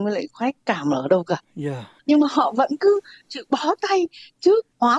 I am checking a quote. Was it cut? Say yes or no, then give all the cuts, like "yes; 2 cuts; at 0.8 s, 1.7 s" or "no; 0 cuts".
yes; 1 cut; at 2.0 s